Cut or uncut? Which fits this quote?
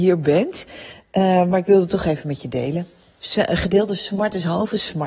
uncut